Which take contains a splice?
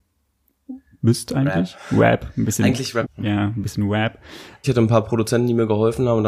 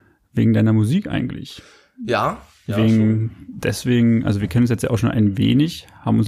first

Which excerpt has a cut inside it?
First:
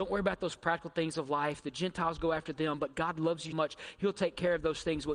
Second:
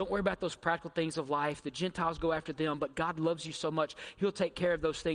first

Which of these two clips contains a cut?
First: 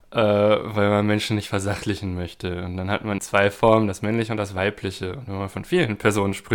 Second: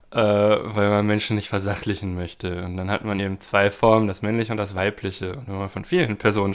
first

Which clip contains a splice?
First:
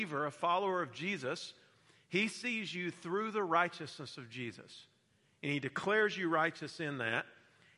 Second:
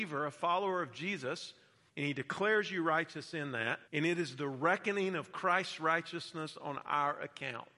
second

